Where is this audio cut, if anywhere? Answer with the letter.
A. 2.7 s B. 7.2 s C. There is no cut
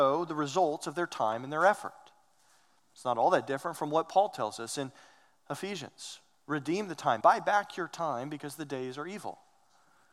B